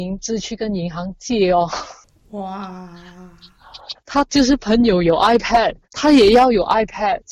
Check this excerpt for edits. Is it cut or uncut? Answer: cut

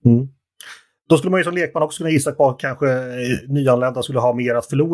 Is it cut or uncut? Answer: uncut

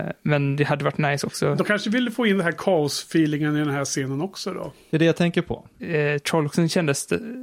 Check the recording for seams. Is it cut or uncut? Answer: cut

